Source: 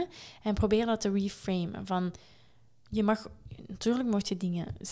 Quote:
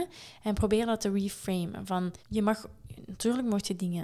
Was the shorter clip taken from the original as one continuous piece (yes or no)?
no